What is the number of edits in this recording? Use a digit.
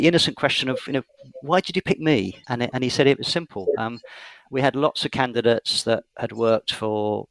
1